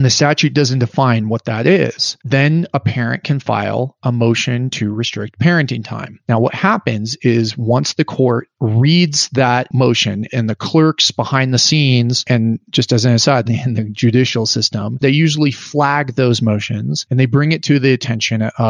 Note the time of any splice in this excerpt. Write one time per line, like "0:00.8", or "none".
0:13.5
0:15.0